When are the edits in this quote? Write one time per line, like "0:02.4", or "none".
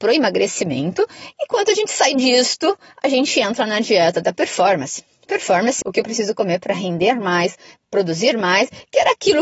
0:05.8